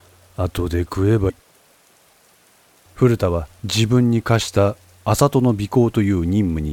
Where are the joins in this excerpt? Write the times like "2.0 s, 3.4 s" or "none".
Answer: 1.3 s